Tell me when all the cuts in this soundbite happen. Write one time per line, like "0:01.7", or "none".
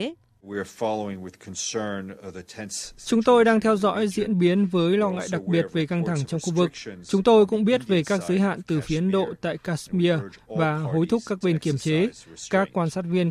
none